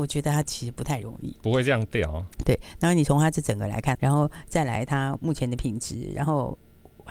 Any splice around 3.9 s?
yes; 2 cuts; at 2.4 s, 3.9 s

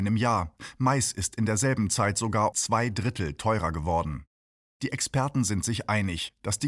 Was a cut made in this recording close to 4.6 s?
no; 1 cut; at 2.5 s

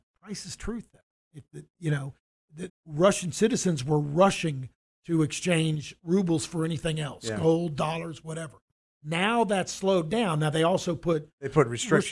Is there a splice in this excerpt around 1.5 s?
no; 1 cut; at 2.7 s

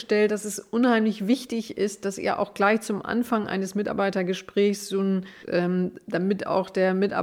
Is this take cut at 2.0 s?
no; 1 cut; at 5.4 s

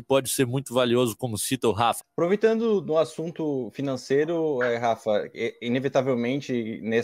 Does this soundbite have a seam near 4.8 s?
no; 1 cut; at 2.0 s

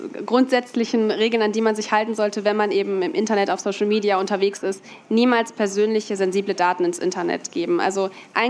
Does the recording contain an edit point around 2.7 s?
no; 0 cuts

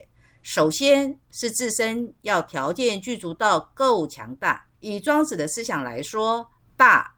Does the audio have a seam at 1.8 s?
no; 1 cut; at 4.7 s

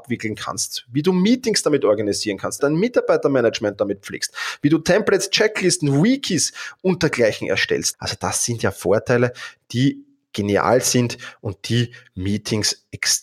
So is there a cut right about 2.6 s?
yes; 2 cuts; at 2.6 s, 7.9 s

